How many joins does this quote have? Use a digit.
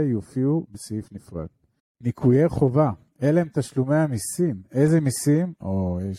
1